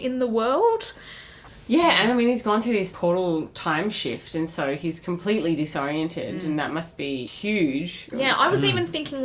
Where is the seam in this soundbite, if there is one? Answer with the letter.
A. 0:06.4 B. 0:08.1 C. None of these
B